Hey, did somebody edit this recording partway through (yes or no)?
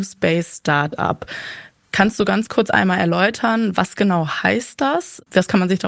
no